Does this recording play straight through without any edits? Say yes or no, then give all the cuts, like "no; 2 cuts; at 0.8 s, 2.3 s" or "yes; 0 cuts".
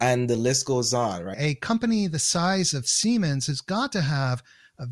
no; 1 cut; at 1.3 s